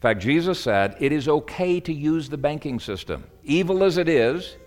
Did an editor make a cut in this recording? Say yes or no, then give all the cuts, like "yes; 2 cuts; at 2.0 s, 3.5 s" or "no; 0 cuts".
no; 0 cuts